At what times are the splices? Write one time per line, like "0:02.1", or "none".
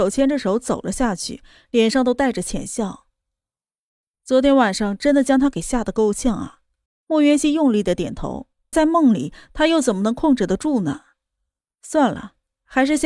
0:04.1
0:06.9
0:08.7